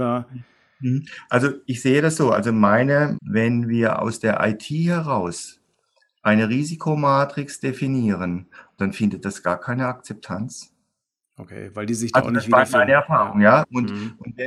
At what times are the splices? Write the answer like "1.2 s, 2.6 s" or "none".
1.6 s, 3.1 s, 8.8 s